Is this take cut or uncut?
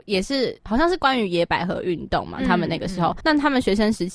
cut